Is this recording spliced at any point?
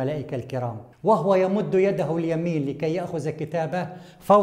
yes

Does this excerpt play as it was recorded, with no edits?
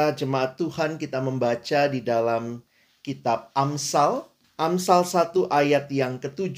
no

